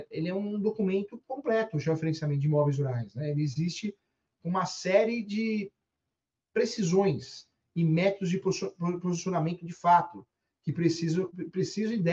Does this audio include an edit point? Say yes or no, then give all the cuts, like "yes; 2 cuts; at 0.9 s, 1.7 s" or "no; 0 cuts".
no; 0 cuts